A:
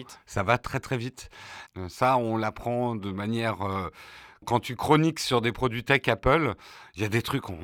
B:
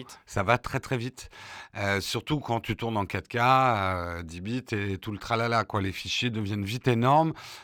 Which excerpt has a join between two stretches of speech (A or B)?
A